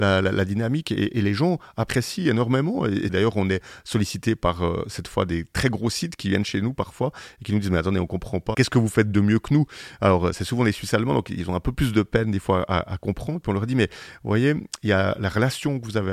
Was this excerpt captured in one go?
no; 1 cut; at 8.5 s

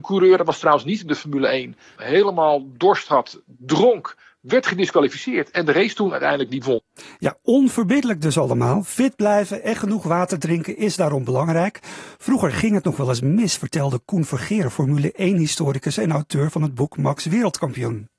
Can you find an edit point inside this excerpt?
yes; 1 cut; at 2.0 s

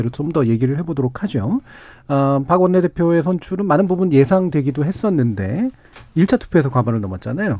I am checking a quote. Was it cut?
no; 0 cuts

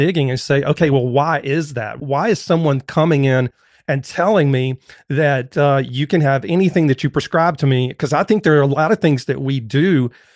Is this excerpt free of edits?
yes; 0 cuts

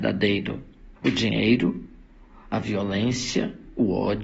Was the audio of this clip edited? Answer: yes; 1 cut; at 1.0 s

